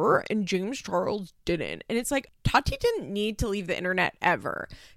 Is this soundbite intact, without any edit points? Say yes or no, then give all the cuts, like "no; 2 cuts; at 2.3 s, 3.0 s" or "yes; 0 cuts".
no; 1 cut; at 2.3 s